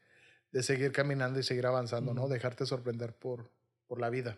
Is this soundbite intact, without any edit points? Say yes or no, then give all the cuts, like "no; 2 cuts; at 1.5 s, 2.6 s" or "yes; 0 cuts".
yes; 0 cuts